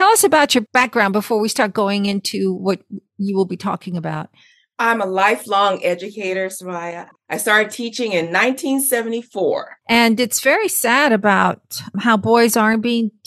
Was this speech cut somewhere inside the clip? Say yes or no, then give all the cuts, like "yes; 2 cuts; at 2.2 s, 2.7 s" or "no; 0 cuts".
yes; 1 cut; at 9.8 s